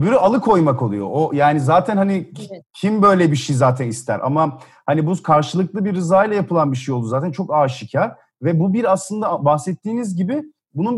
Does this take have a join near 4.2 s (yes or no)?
no